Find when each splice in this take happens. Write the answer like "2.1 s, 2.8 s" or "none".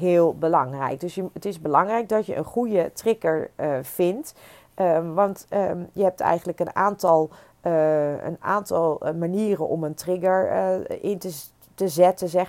none